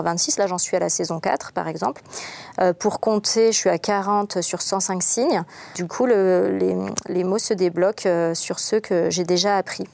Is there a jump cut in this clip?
no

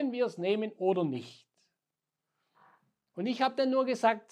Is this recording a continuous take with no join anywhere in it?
yes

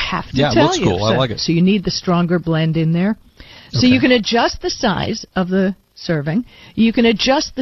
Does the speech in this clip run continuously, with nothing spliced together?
no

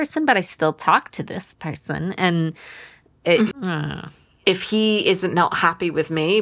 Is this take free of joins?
no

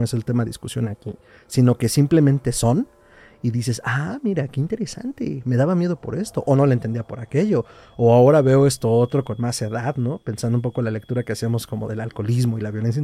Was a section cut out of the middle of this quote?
no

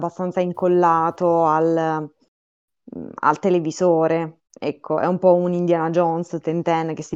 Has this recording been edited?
yes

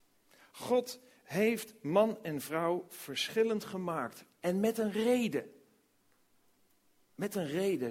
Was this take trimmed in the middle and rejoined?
no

